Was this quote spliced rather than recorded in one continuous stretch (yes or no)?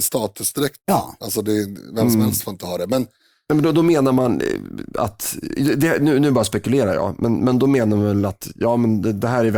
no